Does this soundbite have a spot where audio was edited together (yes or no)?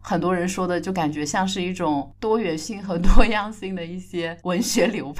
no